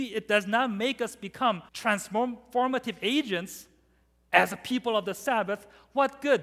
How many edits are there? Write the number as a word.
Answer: one